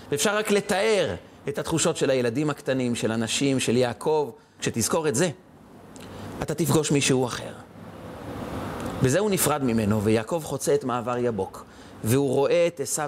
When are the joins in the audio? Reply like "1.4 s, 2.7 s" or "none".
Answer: 4.6 s

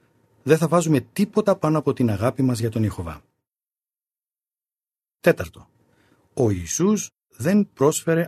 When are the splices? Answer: none

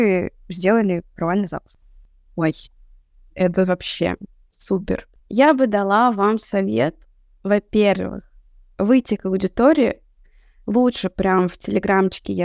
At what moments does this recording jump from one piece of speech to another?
5.2 s

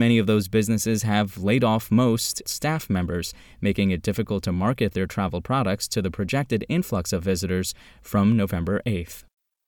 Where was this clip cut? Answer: 2.5 s

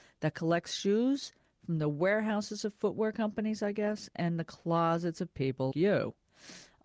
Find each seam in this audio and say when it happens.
5.7 s

